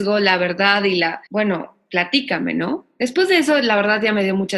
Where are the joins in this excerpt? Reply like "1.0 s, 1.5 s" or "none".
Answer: 1.3 s

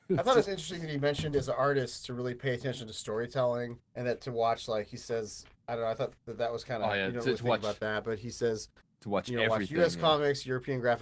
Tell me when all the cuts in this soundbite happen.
3.8 s

